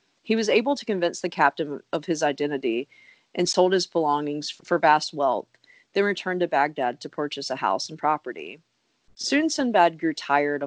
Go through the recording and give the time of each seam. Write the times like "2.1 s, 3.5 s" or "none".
4.6 s